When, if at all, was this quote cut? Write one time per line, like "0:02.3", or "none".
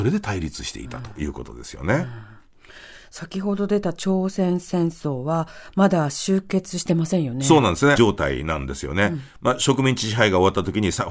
0:08.0

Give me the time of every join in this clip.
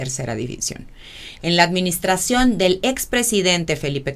0:01.3

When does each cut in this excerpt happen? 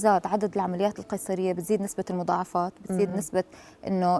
none

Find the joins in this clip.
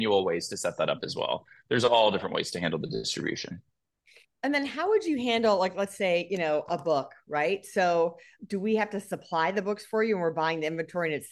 none

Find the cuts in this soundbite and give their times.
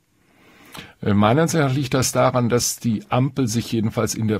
none

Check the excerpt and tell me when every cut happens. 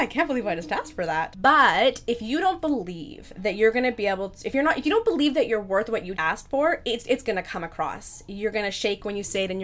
0:06.2

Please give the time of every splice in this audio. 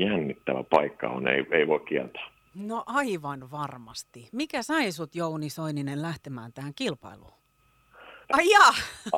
0:08.2

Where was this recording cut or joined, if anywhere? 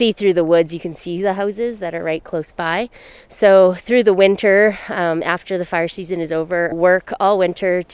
0:06.7

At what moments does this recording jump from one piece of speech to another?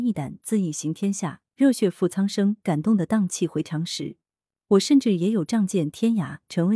none

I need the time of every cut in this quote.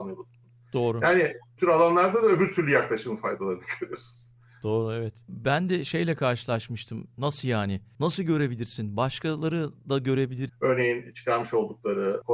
0:07.1
0:10.5

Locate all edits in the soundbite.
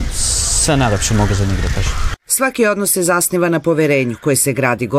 none

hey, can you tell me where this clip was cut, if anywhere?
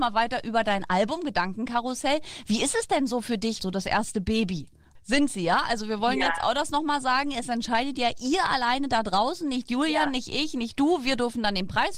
0:03.6
0:04.9

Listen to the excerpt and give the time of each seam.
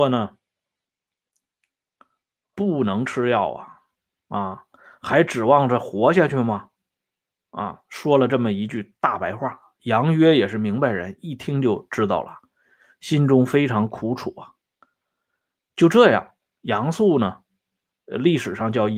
none

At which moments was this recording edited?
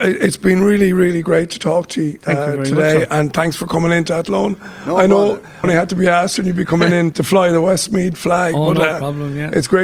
0:05.6
0:07.1

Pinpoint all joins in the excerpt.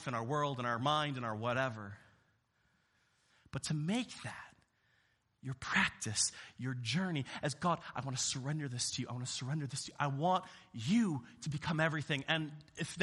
none

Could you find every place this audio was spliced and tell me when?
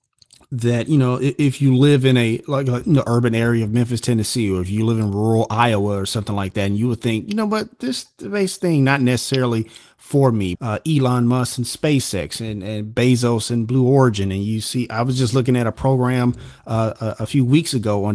0:10.6

